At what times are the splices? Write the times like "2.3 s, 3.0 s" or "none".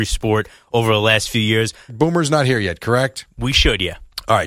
1.9 s